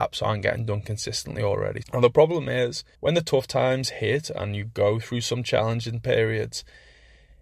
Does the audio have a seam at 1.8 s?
yes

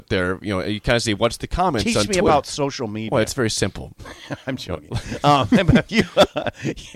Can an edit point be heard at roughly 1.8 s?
no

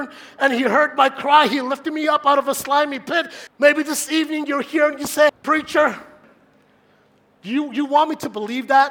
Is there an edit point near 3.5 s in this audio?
yes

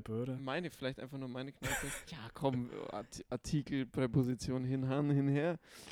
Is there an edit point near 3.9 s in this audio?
no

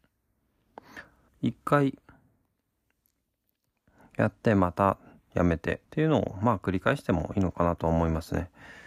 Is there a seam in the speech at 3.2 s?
no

